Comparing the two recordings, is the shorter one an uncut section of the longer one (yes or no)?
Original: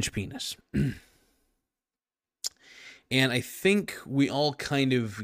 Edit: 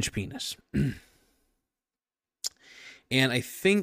yes